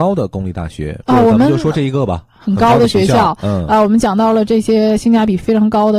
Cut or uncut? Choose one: cut